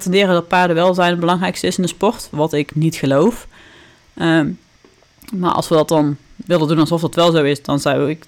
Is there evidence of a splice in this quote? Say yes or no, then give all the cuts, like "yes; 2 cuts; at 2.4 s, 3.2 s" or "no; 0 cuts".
no; 0 cuts